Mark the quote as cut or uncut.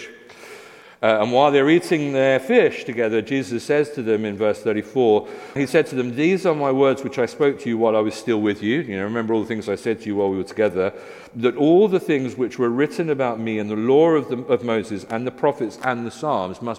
cut